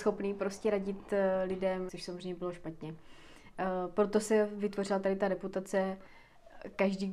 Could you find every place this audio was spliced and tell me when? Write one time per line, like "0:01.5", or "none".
0:01.9